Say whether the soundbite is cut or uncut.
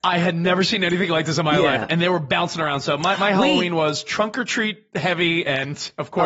uncut